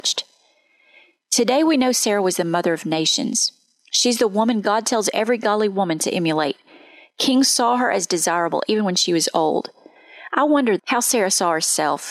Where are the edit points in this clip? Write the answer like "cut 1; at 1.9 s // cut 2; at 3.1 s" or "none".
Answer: cut 1; at 10.8 s